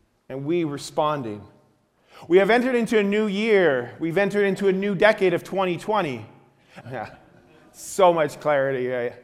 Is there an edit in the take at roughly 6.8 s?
yes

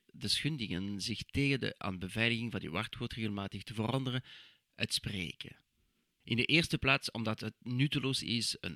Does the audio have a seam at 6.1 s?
no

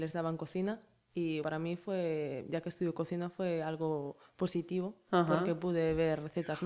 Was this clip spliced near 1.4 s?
yes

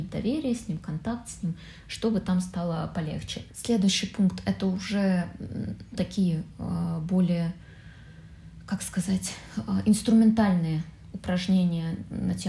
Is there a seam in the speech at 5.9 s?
yes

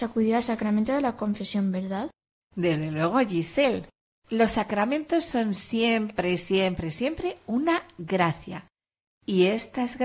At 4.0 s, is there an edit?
no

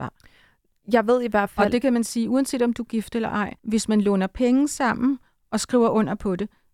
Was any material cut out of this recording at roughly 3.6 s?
yes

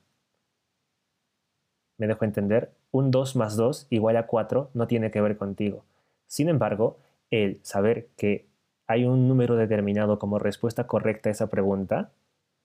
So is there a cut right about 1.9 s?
no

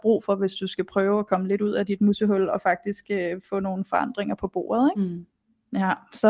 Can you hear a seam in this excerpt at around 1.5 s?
no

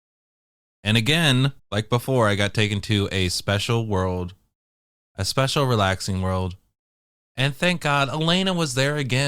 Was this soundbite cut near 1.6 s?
yes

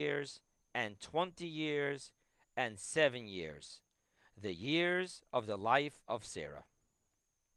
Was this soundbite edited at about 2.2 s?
no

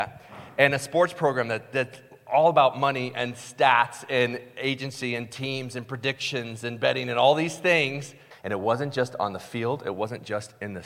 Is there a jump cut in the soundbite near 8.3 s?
yes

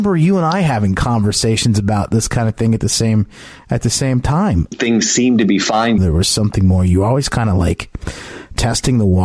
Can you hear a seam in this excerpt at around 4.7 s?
yes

